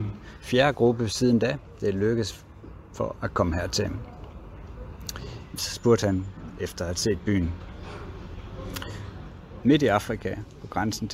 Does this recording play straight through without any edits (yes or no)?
no